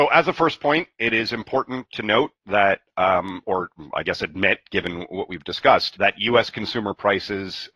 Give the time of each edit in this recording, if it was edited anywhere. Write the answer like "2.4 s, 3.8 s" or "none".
none